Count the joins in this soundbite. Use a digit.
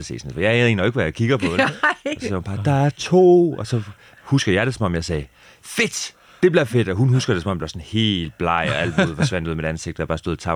0